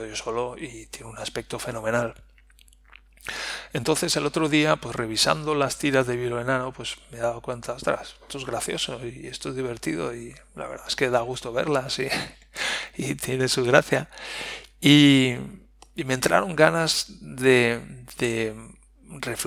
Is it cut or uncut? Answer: uncut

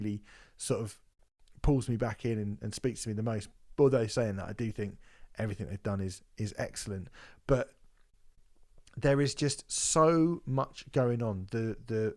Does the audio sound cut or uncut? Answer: uncut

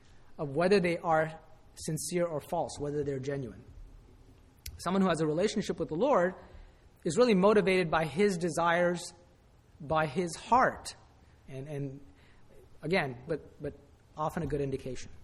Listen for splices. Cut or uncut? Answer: cut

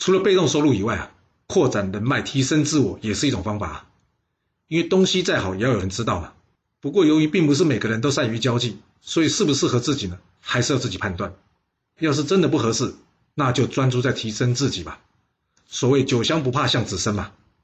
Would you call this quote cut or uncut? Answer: uncut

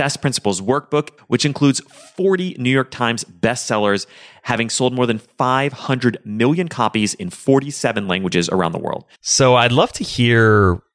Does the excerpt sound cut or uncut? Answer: cut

